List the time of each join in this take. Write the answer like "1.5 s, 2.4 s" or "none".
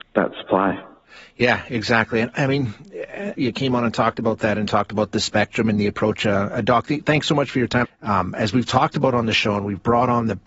3.4 s, 7.8 s

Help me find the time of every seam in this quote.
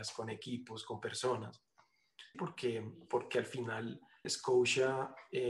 2.3 s, 4.2 s

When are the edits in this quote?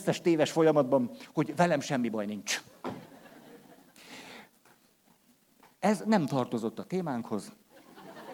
none

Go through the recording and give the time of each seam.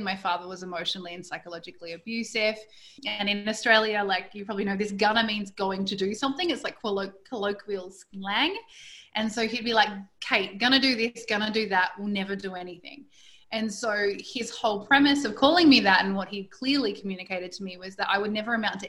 3.0 s

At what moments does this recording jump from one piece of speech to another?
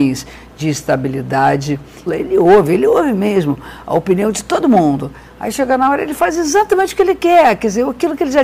2.1 s

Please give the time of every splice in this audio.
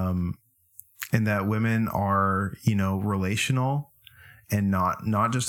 none

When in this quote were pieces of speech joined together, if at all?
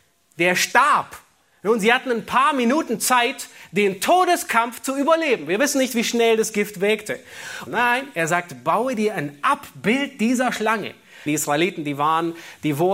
7.7 s, 11.3 s

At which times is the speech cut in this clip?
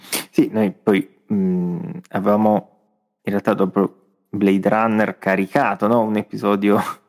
none

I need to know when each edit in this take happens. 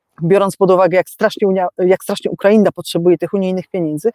none

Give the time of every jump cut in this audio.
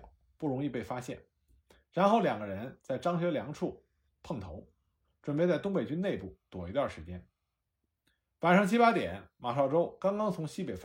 none

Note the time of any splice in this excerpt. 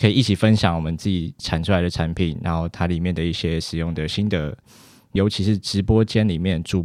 none

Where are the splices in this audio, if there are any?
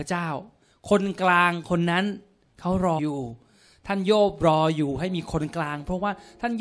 3.0 s

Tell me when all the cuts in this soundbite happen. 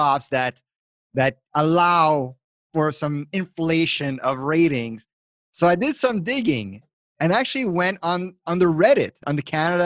none

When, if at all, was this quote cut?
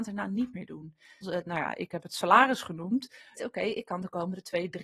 1.2 s, 3.4 s

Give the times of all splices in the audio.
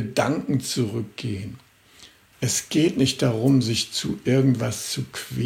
2.3 s

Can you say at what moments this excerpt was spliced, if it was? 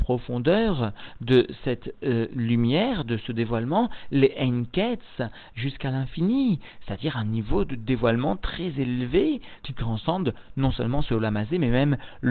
none

